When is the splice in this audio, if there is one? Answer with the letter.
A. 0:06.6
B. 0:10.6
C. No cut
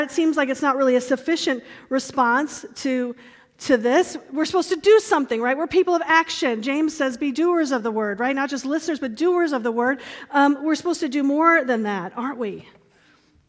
C